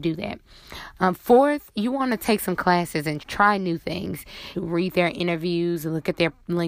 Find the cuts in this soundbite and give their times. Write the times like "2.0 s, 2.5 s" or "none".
3.2 s, 4.5 s